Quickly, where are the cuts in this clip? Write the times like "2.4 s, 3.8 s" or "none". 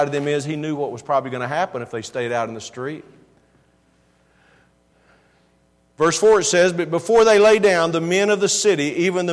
none